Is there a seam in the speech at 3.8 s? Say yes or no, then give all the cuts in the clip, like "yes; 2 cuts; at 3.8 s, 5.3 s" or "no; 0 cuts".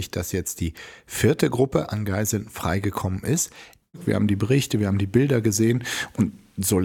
yes; 1 cut; at 3.8 s